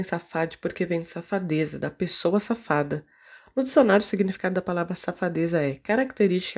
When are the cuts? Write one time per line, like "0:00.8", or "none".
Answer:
none